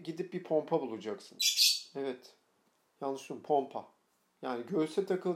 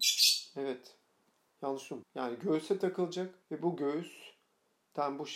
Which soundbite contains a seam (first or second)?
second